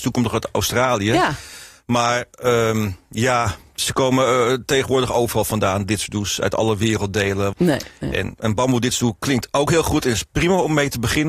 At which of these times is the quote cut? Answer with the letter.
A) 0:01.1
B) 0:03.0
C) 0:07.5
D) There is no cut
C